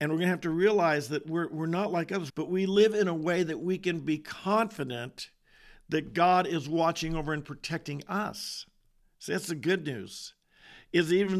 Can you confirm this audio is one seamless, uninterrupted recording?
no; 1 cut; at 2.3 s

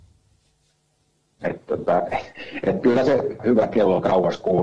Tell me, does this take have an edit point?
yes; 2 cuts; at 1.4 s, 3.4 s

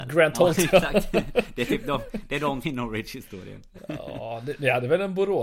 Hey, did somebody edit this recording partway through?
yes; 1 cut; at 2.6 s

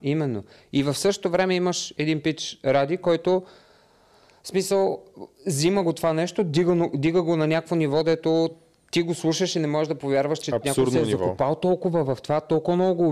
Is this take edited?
no; 0 cuts

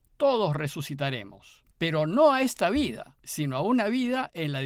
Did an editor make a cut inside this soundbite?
yes; 2 cuts; at 1.7 s, 3.2 s

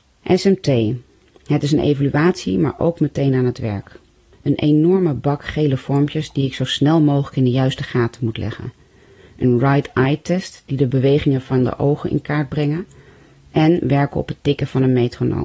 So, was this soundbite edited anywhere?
no; 0 cuts

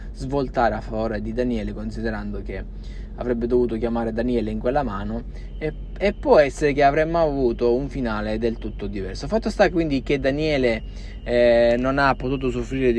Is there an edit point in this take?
no; 0 cuts

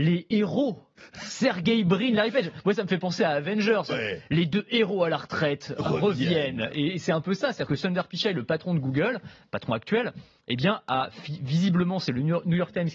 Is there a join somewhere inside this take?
yes; 1 cut; at 3.9 s

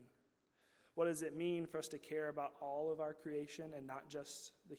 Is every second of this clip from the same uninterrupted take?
yes; 0 cuts

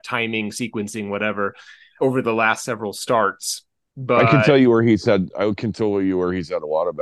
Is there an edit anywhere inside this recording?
yes; 1 cut; at 2.0 s

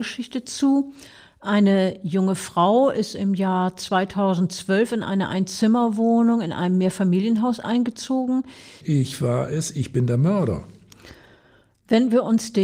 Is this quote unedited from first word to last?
no; 1 cut; at 8.8 s

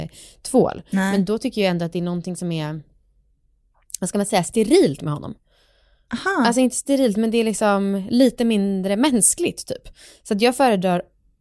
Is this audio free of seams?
yes; 0 cuts

